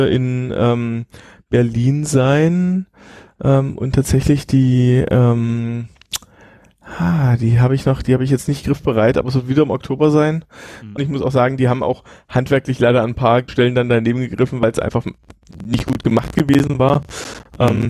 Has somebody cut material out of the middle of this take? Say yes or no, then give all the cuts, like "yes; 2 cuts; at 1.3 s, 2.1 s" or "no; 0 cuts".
yes; 2 cuts; at 11.0 s, 13.5 s